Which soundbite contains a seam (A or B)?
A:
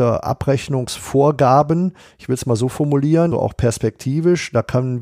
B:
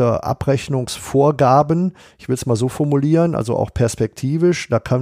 A